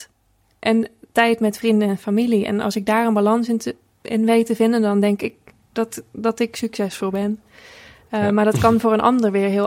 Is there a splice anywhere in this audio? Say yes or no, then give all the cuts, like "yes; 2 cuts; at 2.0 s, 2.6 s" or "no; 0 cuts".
no; 0 cuts